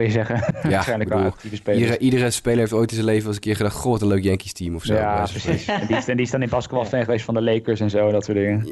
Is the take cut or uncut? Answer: uncut